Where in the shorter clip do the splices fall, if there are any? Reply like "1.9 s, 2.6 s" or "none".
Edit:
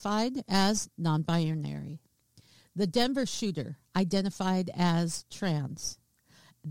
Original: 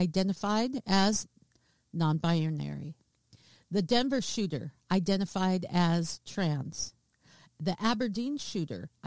0.9 s

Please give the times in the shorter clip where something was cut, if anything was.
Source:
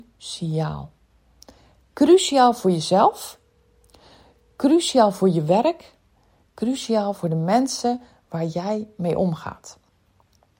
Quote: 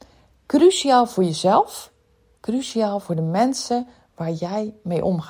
2.3 s

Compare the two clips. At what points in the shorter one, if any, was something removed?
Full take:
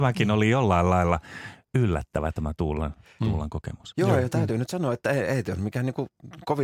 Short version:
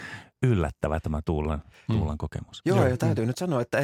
none

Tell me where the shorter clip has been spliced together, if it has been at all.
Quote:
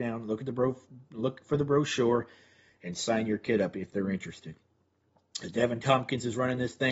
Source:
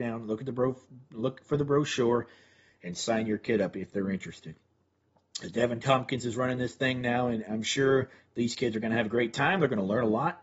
none

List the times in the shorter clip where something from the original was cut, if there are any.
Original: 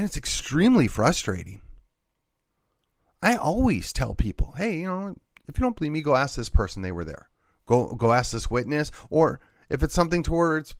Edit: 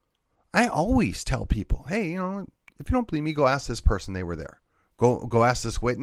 none

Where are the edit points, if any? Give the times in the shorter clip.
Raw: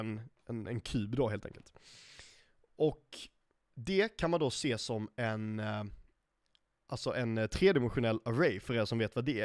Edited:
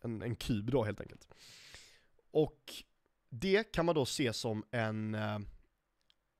none

